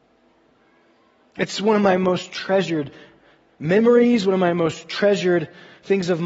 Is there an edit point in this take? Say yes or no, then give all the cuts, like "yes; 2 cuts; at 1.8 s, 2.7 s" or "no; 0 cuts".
no; 0 cuts